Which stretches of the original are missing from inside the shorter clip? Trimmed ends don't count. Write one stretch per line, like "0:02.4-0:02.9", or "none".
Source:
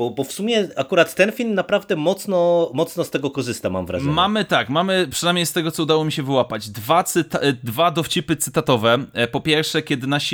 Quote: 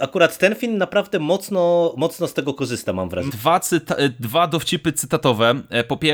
0:04.0-0:06.7